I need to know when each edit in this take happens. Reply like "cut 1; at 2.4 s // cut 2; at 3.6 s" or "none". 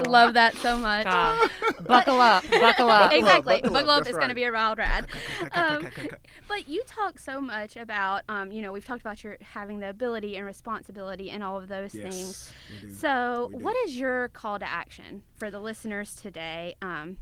none